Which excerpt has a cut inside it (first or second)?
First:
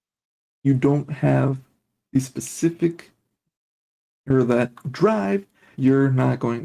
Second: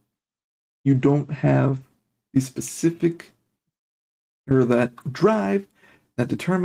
first